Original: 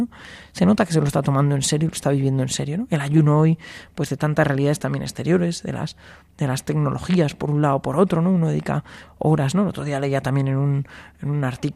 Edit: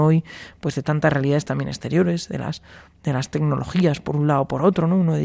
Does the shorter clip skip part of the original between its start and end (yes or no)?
no